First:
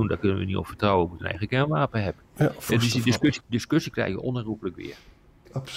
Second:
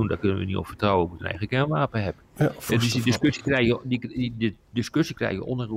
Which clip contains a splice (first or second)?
first